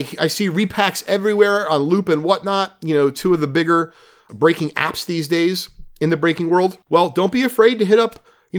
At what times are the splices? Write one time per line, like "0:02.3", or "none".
0:06.8